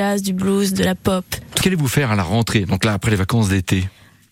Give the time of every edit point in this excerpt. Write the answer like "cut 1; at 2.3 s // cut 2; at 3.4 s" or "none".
cut 1; at 1.6 s